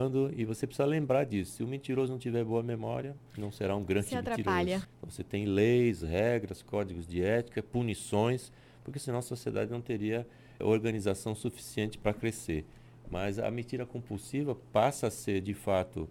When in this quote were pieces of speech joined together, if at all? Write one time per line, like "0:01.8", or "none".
0:04.8